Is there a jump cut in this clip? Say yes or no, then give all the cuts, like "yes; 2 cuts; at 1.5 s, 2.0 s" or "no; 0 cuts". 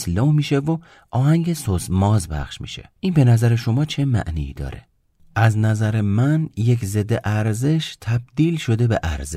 yes; 1 cut; at 3.0 s